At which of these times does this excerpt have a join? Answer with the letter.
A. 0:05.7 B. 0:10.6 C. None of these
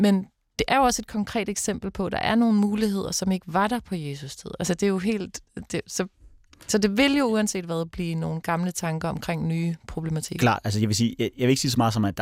C